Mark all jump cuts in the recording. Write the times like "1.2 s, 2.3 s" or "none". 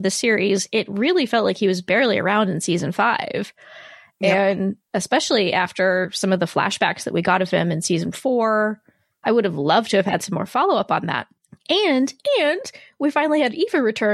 none